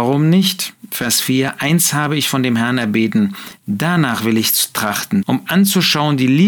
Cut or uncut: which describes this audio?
cut